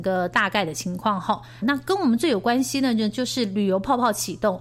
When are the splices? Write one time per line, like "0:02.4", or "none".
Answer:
0:01.6

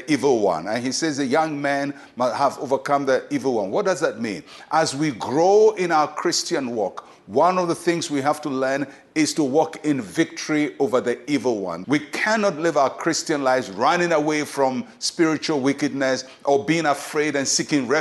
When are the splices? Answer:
0:11.8

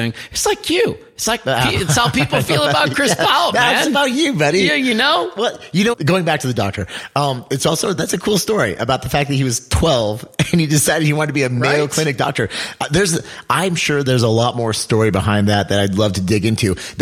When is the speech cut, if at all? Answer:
0:05.9

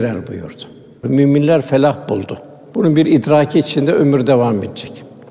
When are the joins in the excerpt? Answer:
0:01.0
0:02.7

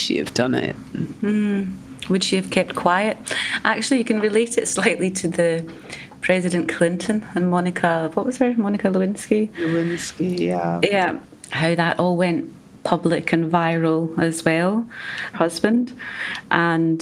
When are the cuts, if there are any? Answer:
0:11.5
0:15.3

